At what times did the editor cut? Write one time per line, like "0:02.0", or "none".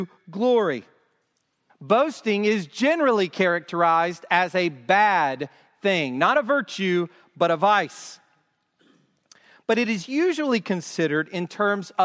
0:01.7